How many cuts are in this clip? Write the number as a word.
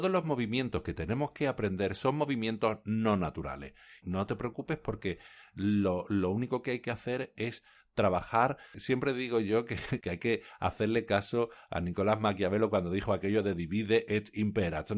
one